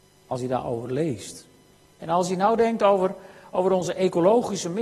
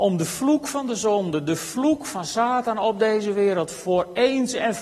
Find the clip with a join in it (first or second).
first